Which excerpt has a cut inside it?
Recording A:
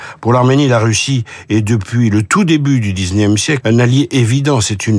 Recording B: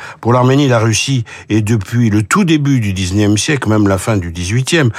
A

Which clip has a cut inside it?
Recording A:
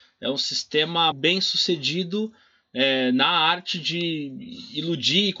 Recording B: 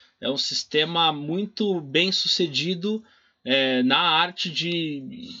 A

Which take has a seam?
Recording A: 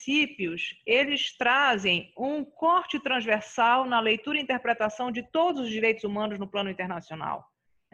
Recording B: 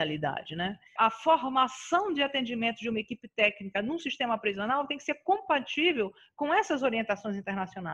B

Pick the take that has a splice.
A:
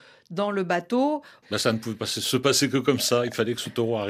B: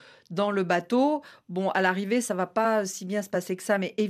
A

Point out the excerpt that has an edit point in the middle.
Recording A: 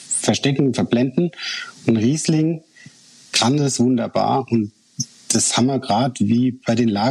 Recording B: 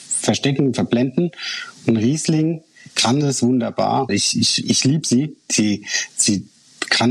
B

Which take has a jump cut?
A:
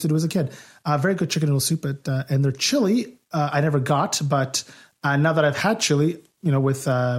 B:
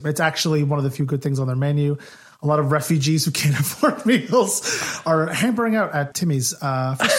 B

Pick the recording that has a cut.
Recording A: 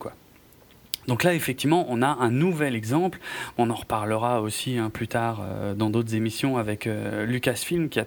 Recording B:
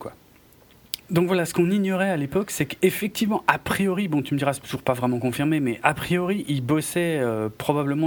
B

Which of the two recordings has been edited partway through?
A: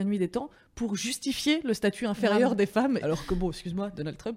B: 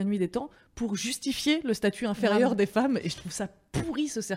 A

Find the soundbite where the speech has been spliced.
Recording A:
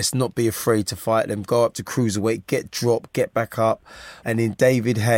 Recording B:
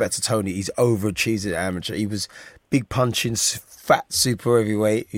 A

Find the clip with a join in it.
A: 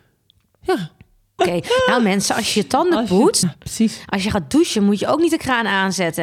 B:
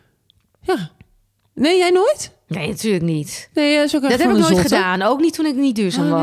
A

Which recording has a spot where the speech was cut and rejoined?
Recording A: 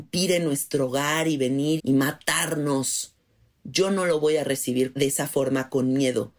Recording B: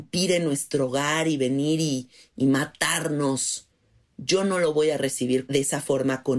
A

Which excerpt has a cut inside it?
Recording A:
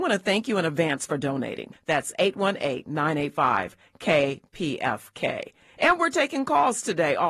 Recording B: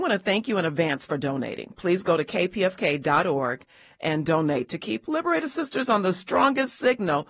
A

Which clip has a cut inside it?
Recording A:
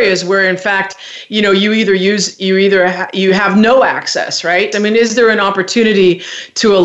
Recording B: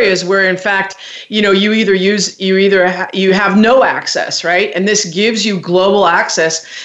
A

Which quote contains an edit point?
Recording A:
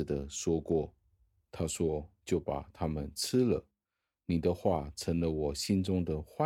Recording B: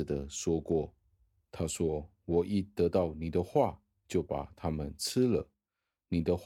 A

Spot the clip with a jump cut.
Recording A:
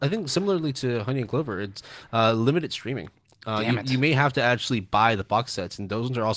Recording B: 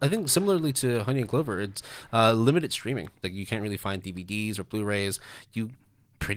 B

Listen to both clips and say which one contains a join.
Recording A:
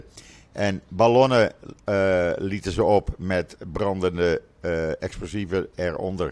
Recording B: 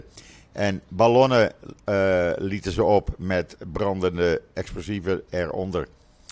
B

